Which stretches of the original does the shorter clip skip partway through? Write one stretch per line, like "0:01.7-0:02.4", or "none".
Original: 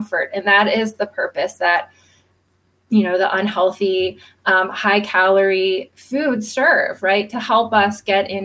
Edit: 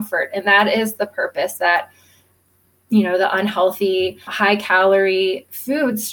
0:04.3-0:04.7